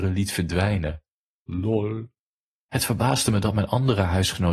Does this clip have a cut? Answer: yes; 1 cut; at 2.6 s

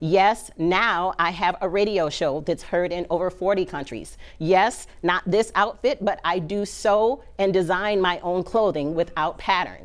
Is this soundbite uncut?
yes; 0 cuts

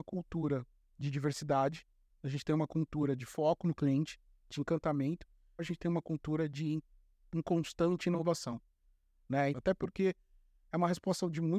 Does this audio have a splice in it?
yes; 2 cuts; at 5.6 s, 9.5 s

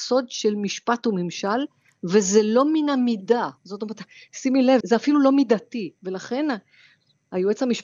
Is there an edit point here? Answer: yes; 2 cuts; at 4.8 s, 6.0 s

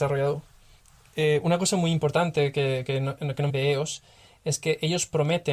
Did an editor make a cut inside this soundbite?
yes; 1 cut; at 3.5 s

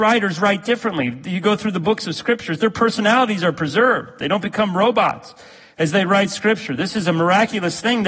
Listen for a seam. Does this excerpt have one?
no; 0 cuts

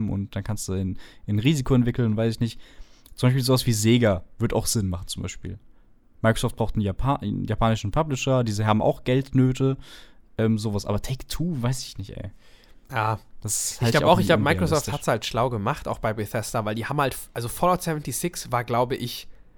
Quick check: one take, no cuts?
yes; 0 cuts

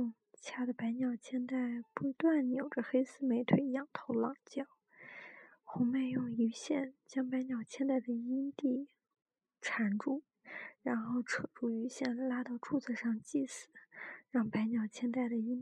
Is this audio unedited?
yes; 0 cuts

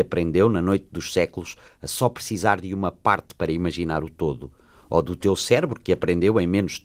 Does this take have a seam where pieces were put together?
no; 0 cuts

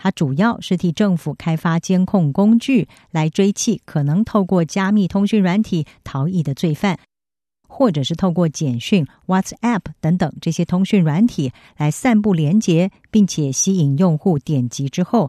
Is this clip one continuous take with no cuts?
no; 1 cut; at 7.6 s

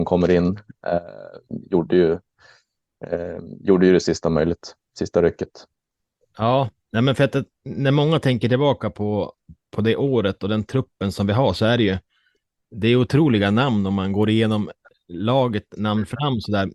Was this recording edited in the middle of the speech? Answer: no; 0 cuts

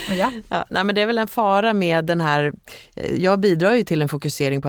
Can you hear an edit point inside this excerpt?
no; 0 cuts

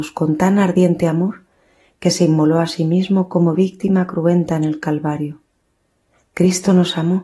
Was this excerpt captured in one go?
yes; 0 cuts

